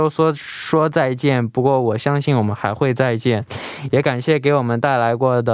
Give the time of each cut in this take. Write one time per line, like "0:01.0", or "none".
none